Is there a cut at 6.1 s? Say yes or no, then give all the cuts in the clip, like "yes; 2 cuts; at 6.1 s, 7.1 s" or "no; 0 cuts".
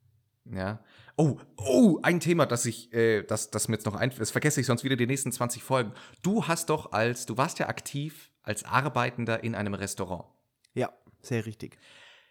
no; 0 cuts